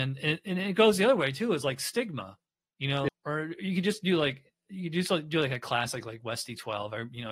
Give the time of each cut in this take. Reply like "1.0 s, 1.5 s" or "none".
3.1 s